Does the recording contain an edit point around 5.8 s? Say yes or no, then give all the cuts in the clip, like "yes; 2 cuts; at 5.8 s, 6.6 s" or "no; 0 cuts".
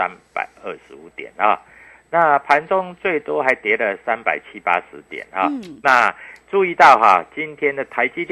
no; 0 cuts